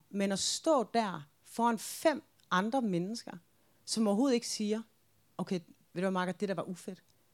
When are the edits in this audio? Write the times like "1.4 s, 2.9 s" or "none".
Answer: none